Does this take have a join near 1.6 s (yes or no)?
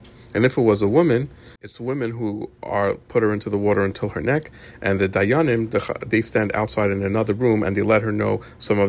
yes